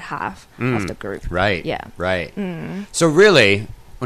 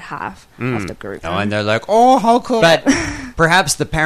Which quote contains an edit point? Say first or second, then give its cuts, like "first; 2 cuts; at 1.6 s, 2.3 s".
second; 2 cuts; at 1.2 s, 2.6 s